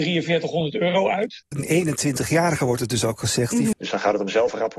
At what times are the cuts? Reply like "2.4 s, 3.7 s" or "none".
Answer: 1.5 s, 3.7 s